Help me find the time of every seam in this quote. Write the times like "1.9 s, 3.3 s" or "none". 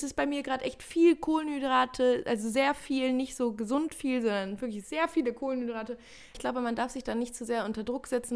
6.3 s